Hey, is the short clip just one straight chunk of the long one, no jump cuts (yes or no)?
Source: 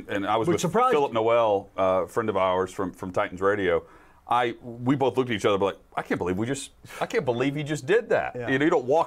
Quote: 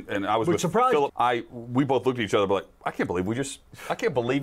no